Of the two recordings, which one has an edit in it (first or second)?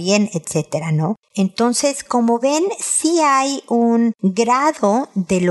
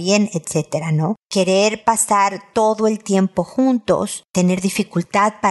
first